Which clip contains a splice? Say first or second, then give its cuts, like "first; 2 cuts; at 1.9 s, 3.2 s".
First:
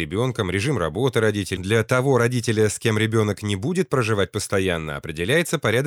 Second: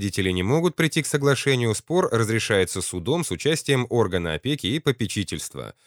first; 1 cut; at 1.6 s